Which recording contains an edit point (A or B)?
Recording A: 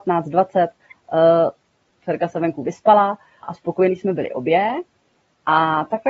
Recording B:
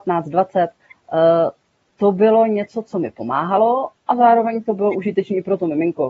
A